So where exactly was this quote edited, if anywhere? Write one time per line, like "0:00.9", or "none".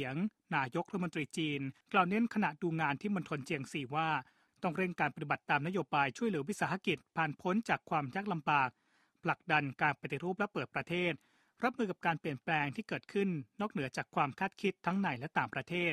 0:01.8